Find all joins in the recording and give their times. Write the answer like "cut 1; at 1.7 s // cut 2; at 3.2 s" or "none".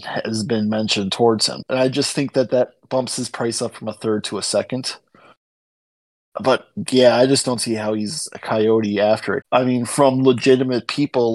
cut 1; at 1.6 s // cut 2; at 9.4 s

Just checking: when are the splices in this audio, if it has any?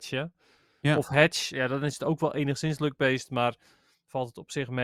cut 1; at 1.5 s

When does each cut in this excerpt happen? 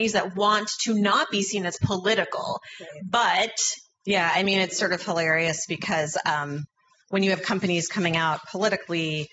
none

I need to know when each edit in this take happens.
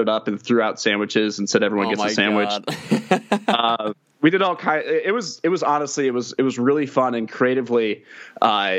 none

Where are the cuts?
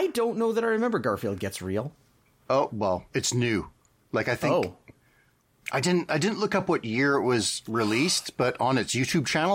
none

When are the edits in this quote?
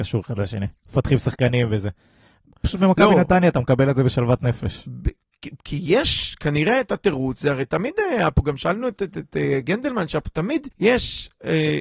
cut 1; at 10.7 s

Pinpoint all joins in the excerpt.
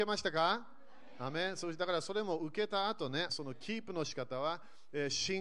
cut 1; at 3.3 s

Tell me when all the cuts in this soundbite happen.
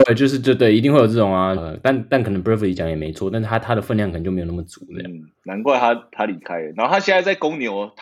cut 1; at 1.6 s

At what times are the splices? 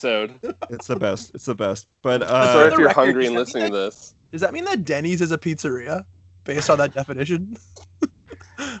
none

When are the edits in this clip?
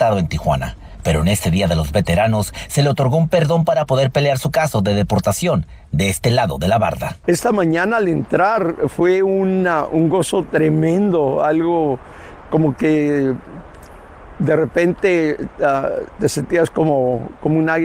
none

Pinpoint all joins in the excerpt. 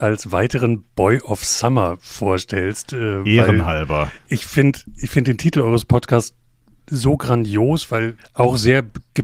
cut 1; at 8.2 s

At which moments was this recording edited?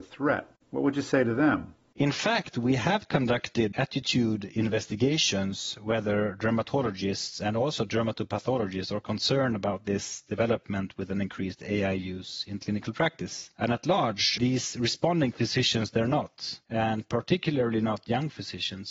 cut 1; at 14.4 s

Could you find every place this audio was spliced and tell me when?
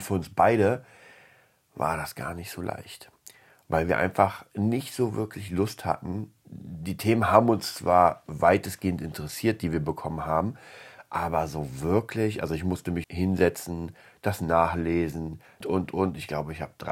cut 1; at 13.0 s // cut 2; at 15.6 s

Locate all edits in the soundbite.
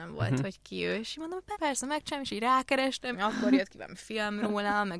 cut 1; at 1.5 s // cut 2; at 3.1 s

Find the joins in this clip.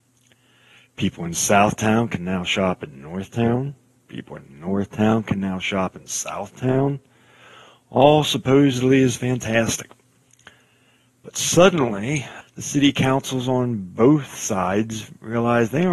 cut 1; at 12.4 s

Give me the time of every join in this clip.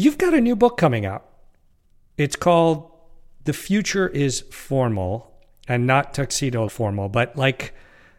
cut 1; at 6.7 s

